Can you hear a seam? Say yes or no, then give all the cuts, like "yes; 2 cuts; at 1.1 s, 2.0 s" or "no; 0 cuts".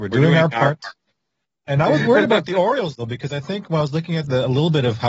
no; 0 cuts